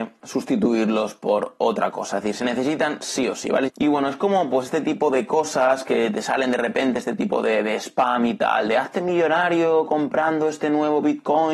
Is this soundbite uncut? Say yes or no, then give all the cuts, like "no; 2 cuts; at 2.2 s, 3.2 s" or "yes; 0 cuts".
no; 1 cut; at 3.7 s